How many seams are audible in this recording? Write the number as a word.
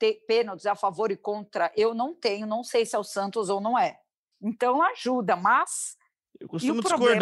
one